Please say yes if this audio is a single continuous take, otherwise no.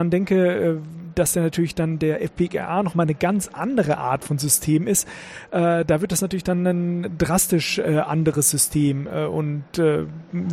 yes